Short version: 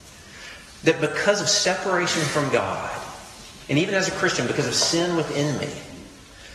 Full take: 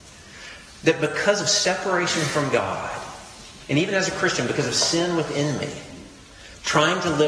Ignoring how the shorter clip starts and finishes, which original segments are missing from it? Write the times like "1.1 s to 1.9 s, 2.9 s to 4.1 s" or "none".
none